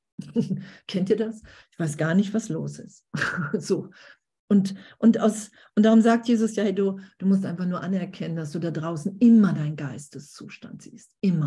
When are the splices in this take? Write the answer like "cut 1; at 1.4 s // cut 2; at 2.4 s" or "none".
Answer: cut 1; at 1.6 s